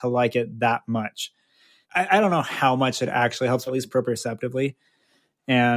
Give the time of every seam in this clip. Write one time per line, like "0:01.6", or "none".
0:01.8
0:03.7